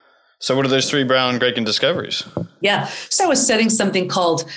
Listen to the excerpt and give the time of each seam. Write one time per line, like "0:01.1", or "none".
0:03.2